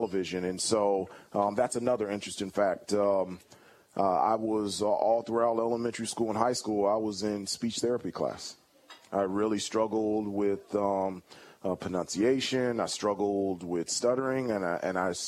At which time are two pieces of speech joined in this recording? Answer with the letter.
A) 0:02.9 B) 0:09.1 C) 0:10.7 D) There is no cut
A